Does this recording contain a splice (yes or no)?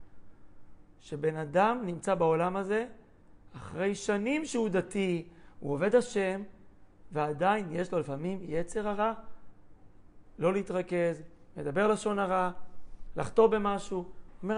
no